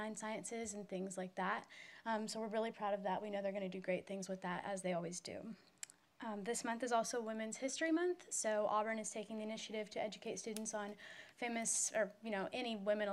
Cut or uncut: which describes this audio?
uncut